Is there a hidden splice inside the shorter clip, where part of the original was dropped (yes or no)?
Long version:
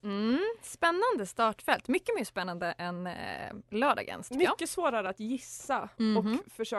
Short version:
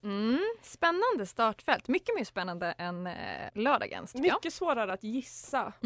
yes